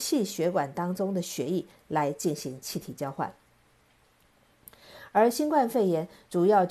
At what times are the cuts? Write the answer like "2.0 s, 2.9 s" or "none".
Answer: none